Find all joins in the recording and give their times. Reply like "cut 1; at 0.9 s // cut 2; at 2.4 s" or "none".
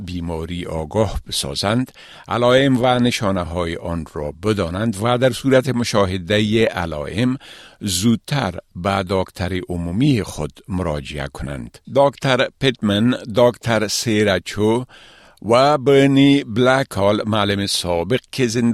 cut 1; at 11.8 s

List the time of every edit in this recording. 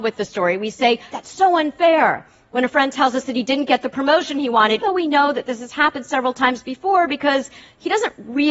cut 1; at 1.1 s // cut 2; at 4.8 s

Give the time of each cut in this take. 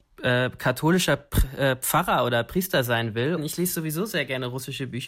cut 1; at 3.4 s

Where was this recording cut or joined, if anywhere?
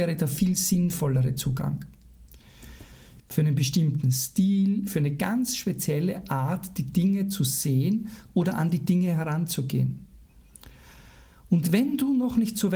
cut 1; at 3.2 s

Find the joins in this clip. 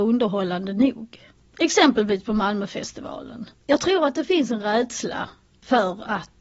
none

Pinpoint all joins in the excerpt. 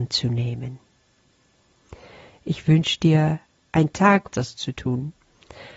cut 1; at 4.3 s

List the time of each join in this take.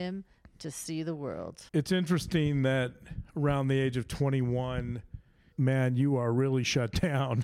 cut 1; at 1.7 s // cut 2; at 5.5 s

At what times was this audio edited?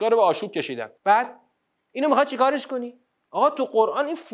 cut 1; at 1.0 s

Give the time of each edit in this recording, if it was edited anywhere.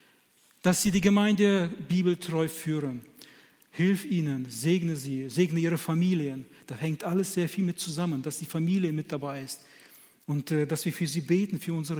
none

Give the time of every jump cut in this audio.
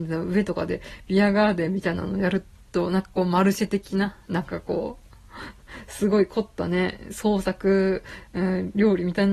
none

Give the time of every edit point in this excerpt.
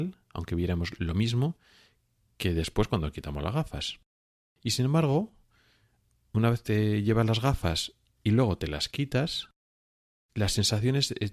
none

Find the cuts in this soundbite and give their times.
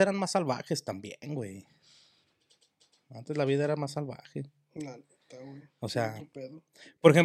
none

